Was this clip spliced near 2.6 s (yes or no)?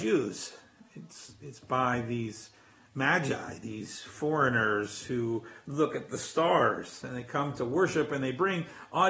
no